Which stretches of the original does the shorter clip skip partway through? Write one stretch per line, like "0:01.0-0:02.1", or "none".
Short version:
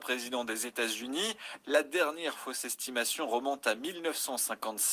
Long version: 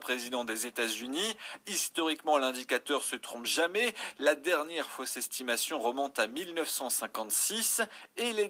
0:01.6-0:04.1